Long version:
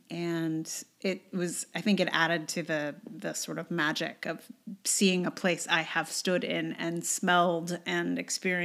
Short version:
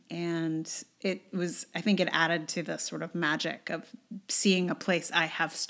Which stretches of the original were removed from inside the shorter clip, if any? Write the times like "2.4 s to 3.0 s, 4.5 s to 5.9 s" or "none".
2.6 s to 3.2 s